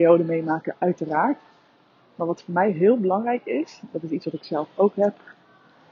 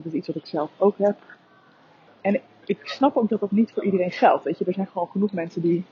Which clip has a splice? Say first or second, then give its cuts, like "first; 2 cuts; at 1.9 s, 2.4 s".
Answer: second; 1 cut; at 2.1 s